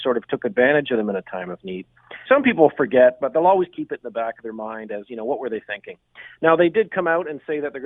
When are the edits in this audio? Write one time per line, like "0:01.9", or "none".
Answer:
0:02.2